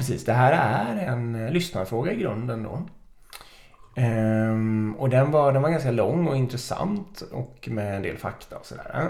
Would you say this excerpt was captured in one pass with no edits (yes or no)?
yes